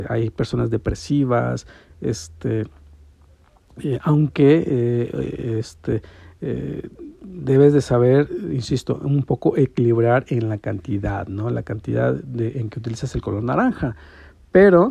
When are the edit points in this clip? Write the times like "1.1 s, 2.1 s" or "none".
none